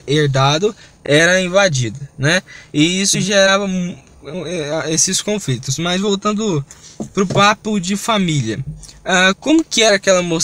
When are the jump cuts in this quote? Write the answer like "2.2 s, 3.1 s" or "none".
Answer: none